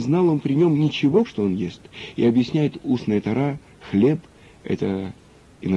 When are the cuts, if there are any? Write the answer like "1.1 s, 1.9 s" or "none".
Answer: 1.2 s